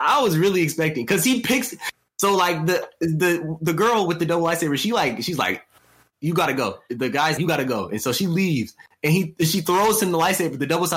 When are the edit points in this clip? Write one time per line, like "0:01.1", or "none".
0:07.4